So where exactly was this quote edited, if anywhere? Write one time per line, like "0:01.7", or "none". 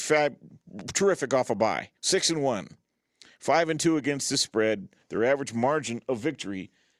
0:02.0